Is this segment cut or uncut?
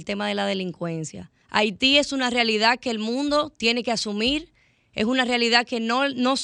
cut